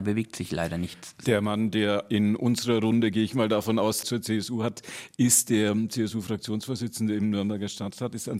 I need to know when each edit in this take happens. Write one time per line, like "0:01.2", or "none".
0:04.0